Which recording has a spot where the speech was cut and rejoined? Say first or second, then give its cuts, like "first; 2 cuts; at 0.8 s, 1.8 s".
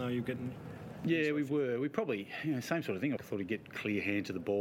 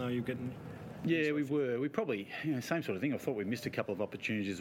first; 1 cut; at 3.2 s